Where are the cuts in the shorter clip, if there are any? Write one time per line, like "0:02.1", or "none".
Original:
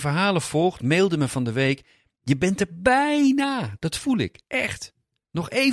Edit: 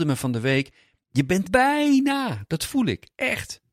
0:01.4

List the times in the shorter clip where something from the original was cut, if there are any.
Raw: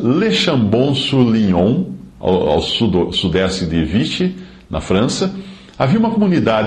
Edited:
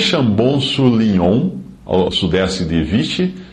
0:02.1

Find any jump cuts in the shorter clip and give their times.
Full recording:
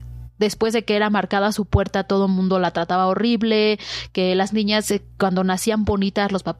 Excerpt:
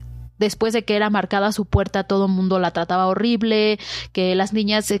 none

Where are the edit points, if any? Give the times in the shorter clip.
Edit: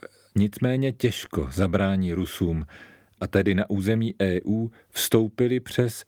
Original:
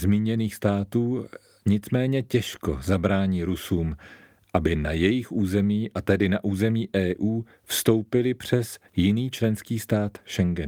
0:03.2

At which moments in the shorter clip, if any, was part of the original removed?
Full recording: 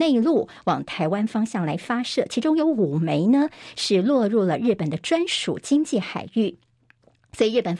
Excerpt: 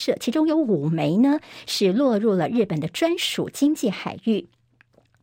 none

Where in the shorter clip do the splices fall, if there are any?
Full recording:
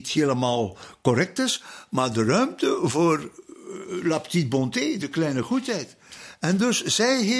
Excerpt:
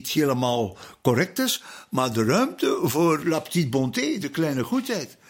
0:03.2

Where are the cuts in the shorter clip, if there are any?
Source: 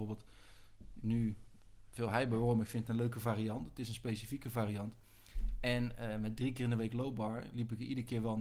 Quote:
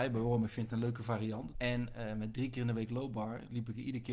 0:01.5

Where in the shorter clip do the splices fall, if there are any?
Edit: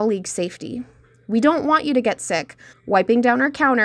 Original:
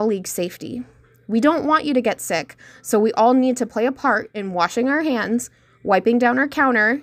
0:02.7

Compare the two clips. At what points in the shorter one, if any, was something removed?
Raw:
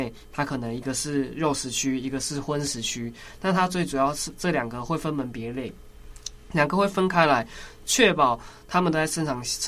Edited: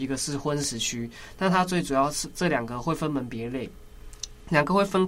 none

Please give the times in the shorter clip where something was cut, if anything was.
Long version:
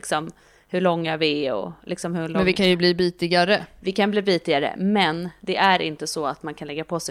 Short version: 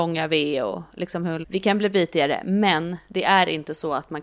0:01.4

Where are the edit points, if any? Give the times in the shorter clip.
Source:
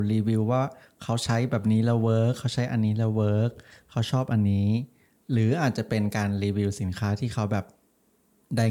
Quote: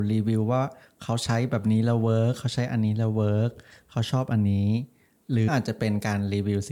0:05.5

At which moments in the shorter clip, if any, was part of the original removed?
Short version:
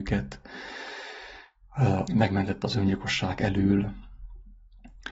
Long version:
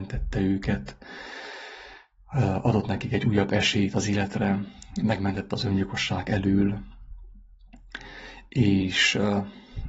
0:02.1

